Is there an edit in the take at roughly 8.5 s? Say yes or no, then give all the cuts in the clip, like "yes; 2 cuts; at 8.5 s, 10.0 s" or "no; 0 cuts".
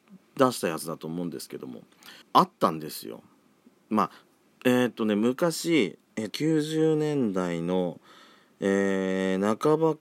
no; 2 cuts; at 2.2 s, 6.3 s